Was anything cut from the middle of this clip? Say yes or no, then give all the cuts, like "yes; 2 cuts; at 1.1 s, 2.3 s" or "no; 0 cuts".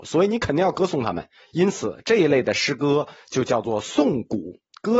no; 0 cuts